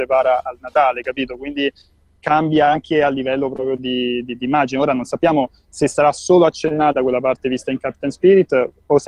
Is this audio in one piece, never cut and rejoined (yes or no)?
yes